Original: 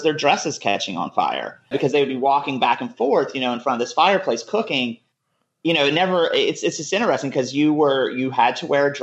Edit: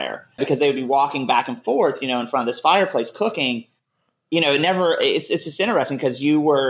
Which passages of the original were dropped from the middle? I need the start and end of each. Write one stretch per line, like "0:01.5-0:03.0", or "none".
none